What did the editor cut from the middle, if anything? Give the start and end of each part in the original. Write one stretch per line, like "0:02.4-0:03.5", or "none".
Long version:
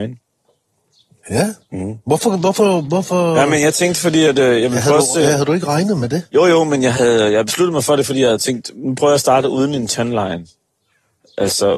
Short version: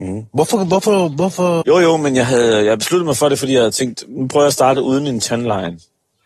0:03.3-0:06.3